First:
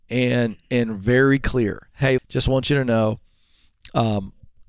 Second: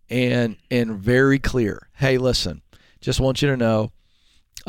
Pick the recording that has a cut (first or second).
first